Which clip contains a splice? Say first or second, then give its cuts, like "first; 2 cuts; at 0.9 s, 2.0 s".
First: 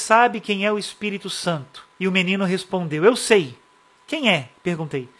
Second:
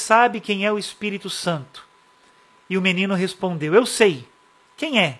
first; 1 cut; at 1.9 s